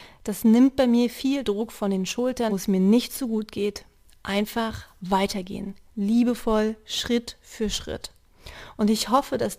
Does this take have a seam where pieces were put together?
yes; 1 cut; at 2.5 s

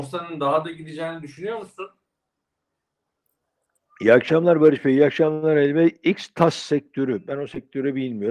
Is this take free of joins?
yes; 0 cuts

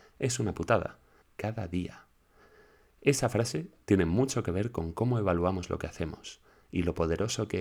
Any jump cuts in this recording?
yes; 1 cut; at 1.2 s

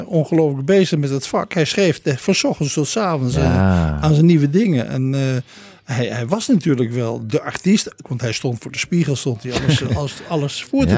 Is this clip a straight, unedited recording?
no; 1 cut; at 8.0 s

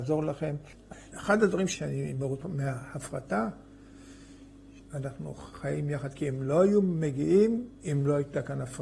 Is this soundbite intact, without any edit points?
no; 2 cuts; at 1.1 s, 4.8 s

